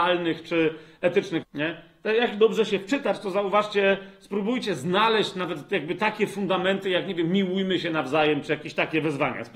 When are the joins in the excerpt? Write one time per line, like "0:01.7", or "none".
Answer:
0:01.4